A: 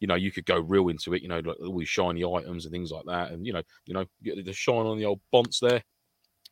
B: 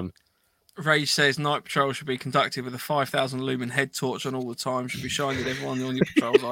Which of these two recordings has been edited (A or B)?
A